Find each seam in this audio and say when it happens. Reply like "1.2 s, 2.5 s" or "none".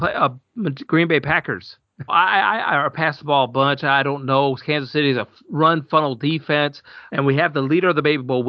2.1 s, 7.1 s

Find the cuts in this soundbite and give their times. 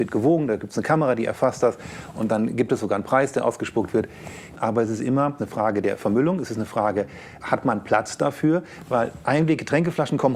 4.6 s

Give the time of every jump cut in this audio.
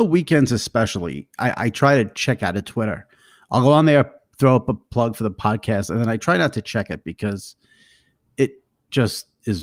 none

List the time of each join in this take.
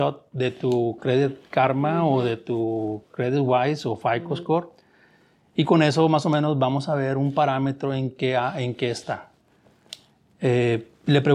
none

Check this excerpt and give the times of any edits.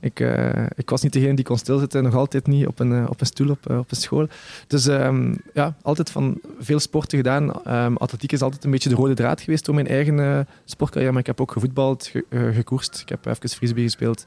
none

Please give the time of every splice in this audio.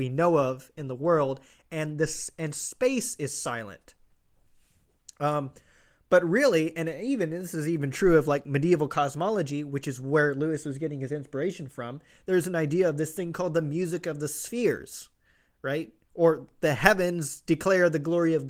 none

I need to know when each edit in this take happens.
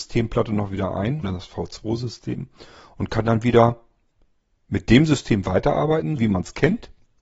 1.2 s, 6.2 s

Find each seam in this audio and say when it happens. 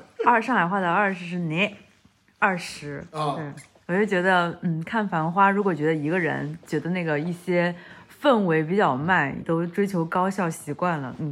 9.4 s

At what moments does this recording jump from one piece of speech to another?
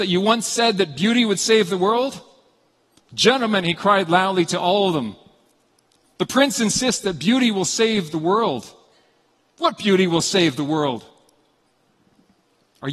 none

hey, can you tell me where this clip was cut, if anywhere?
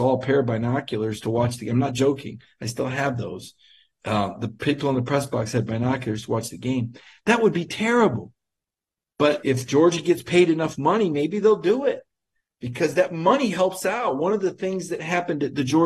9.4 s

